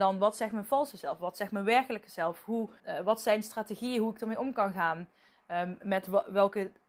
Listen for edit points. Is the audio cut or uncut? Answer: cut